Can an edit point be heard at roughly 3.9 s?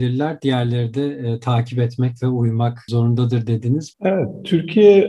yes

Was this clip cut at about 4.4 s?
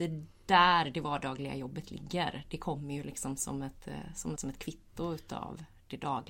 yes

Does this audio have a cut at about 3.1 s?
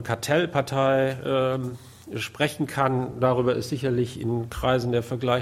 no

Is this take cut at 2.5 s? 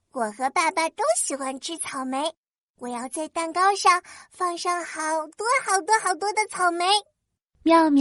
no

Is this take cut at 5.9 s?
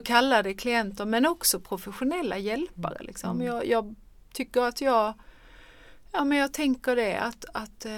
no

